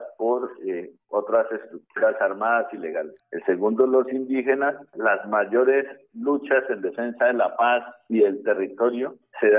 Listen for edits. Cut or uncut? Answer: cut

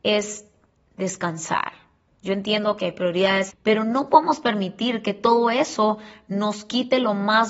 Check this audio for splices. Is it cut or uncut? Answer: cut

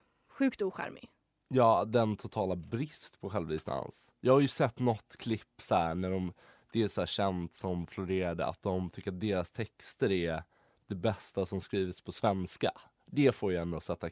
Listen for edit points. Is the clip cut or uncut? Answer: uncut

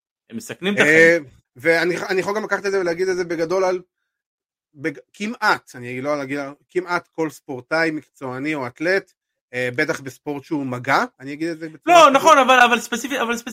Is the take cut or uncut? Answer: cut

